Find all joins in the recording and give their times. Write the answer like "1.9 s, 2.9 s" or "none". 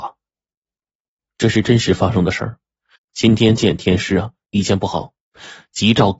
3.0 s